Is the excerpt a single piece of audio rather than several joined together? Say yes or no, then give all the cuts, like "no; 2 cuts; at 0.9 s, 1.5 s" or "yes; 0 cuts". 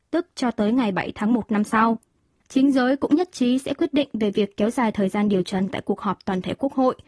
no; 1 cut; at 2.4 s